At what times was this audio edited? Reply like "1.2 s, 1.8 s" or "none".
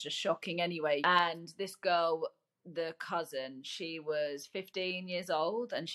1.0 s